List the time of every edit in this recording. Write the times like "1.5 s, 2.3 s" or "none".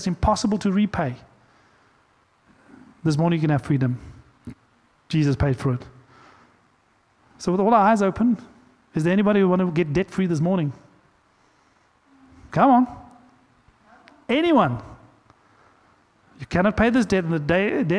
none